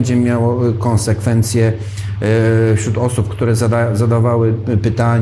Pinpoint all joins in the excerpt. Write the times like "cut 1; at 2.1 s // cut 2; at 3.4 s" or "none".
cut 1; at 3.3 s